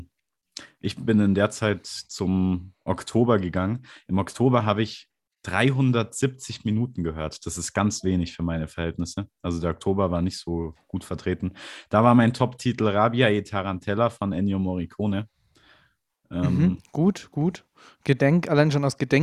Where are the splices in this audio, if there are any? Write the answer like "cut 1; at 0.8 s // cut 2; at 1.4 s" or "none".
none

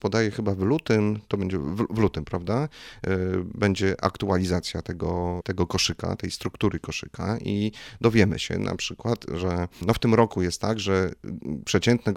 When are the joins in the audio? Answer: none

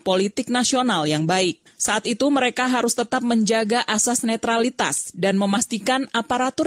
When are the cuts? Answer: cut 1; at 1.7 s

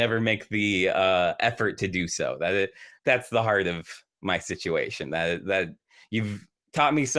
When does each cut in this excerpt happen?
cut 1; at 3.0 s

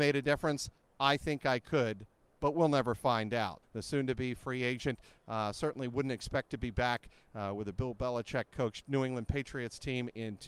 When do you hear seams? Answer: cut 1; at 3.6 s

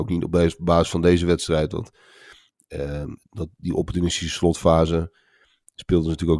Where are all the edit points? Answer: cut 1; at 3.3 s

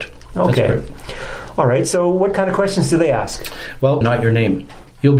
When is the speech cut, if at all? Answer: cut 1; at 4.0 s

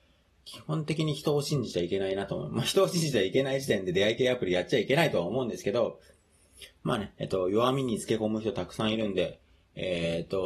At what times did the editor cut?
none

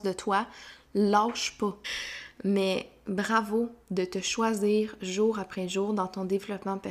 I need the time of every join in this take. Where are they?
cut 1; at 1.8 s

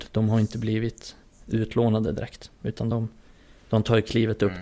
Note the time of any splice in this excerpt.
none

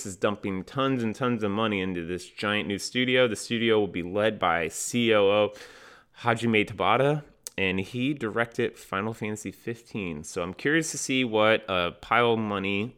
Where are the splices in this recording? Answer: none

